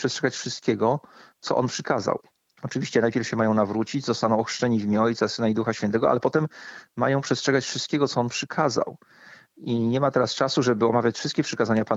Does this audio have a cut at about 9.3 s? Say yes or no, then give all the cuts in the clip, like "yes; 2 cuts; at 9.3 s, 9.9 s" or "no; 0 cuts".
no; 0 cuts